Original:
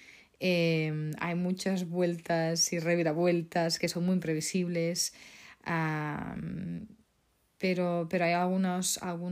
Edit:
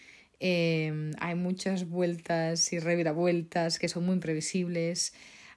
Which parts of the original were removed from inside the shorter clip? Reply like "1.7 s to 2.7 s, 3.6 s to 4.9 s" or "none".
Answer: none

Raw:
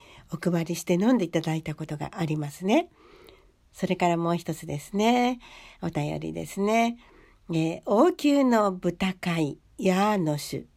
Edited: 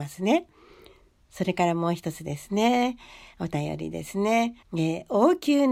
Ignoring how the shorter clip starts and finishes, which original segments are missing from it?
7.0 s to 7.4 s

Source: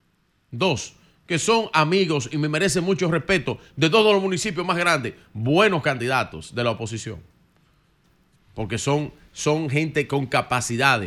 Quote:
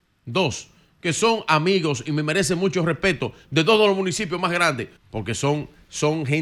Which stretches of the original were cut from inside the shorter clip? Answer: 5.2 s to 8.4 s

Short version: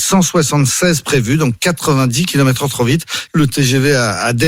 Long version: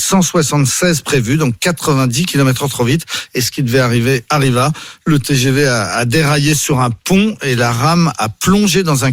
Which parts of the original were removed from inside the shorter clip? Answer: 3.3 s to 5.0 s

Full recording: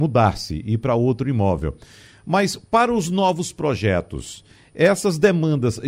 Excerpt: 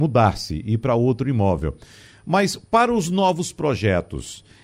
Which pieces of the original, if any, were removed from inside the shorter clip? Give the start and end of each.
none

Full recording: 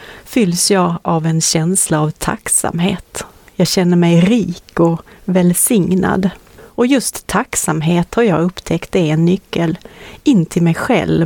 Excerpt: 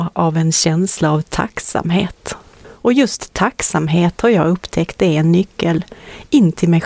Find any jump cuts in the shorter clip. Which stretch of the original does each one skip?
3.4 s to 6.5 s

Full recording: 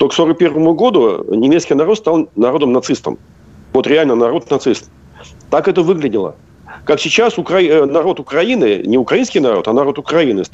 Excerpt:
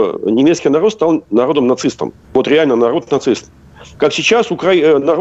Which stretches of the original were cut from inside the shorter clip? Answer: 3.3 s to 3.6 s, 5.3 s to 6.8 s

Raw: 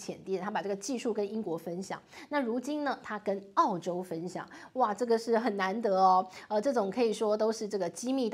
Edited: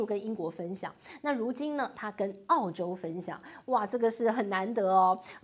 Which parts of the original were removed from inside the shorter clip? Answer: none

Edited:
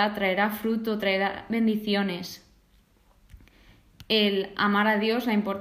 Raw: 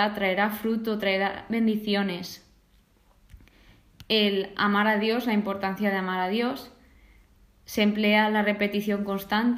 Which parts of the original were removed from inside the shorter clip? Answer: none

